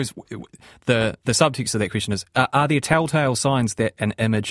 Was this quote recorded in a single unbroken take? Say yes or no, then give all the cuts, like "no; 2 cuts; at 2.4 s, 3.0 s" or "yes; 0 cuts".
yes; 0 cuts